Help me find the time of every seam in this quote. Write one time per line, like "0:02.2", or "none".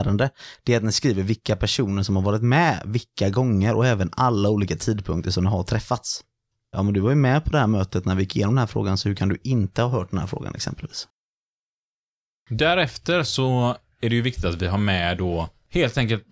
0:06.7